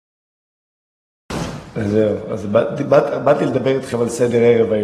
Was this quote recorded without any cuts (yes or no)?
yes